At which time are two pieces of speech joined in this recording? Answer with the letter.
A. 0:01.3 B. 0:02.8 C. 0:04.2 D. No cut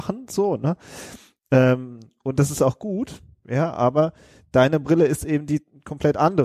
D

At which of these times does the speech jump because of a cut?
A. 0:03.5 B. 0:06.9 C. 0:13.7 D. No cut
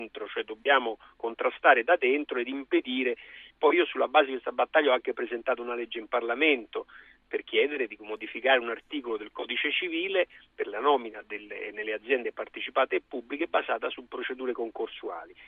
A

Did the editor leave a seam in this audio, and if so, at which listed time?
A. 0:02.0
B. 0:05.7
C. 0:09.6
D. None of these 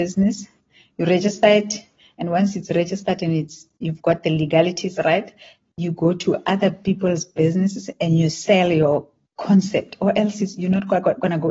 D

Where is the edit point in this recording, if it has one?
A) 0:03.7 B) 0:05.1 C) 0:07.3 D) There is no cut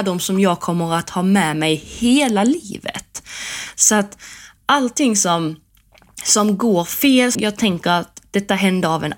C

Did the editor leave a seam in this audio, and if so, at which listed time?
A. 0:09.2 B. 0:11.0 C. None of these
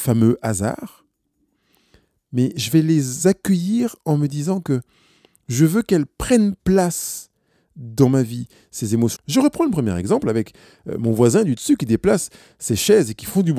A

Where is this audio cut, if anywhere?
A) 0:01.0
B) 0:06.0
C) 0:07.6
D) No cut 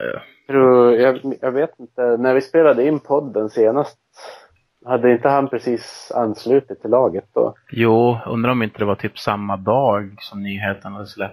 D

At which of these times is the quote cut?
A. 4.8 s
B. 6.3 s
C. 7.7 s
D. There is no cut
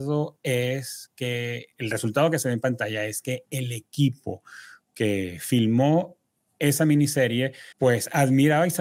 C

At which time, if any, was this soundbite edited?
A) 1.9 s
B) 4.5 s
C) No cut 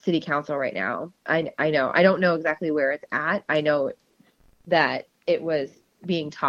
C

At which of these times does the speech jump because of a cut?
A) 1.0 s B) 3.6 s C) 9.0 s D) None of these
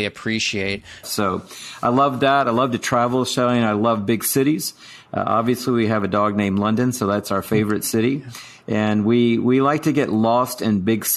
A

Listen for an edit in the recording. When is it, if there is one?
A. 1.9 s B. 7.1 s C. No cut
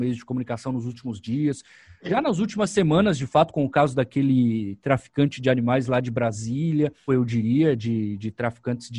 B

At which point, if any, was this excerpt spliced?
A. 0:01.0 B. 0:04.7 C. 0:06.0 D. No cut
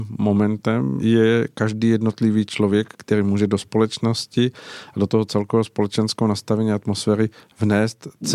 A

